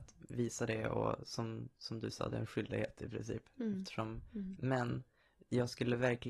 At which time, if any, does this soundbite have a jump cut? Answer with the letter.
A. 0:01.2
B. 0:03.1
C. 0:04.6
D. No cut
C